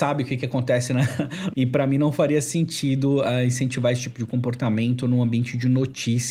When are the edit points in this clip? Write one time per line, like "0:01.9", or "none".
0:01.5